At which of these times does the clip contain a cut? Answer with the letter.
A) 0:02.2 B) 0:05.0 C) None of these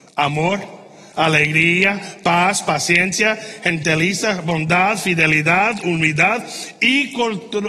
C